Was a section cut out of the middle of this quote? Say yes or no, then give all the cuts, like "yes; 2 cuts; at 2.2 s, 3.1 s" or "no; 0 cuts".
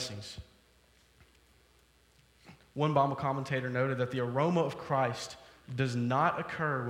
yes; 1 cut; at 5.6 s